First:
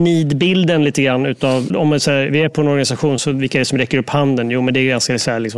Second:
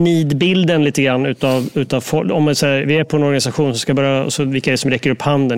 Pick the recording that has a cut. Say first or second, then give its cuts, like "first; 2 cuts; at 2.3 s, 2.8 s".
first; 2 cuts; at 1.7 s, 3.2 s